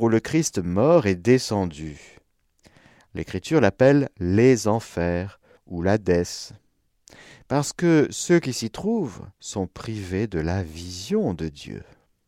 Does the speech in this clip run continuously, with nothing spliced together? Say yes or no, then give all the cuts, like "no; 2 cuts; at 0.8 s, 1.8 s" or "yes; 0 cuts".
no; 2 cuts; at 5.6 s, 9.3 s